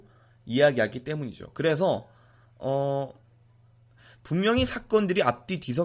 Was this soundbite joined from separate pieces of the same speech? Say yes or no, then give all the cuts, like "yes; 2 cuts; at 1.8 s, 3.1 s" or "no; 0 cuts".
no; 0 cuts